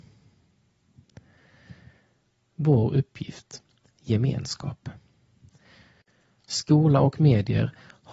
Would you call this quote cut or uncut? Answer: uncut